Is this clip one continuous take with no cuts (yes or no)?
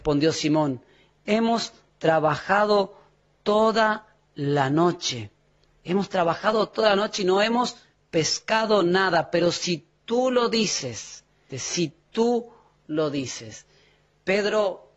no